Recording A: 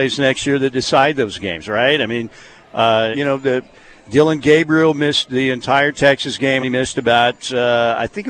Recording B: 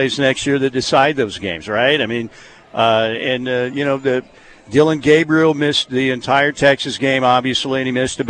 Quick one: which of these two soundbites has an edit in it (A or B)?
A